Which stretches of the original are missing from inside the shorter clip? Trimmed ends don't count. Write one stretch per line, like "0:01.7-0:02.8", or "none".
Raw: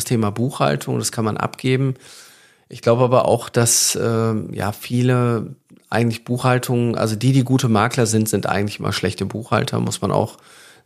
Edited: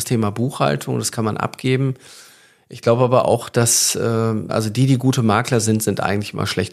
0:04.5-0:06.9